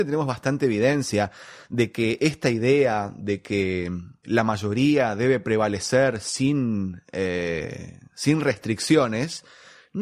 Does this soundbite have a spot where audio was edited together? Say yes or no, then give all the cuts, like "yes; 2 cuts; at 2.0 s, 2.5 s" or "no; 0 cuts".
yes; 1 cut; at 4.2 s